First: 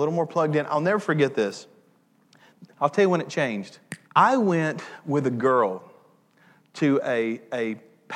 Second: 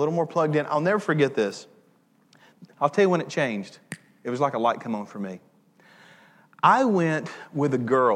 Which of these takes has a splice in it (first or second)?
first